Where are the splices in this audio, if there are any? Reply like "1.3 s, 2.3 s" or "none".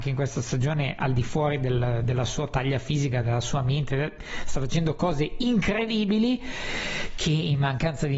none